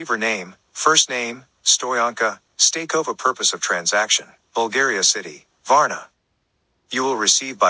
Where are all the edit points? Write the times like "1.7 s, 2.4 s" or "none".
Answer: 2.5 s, 4.5 s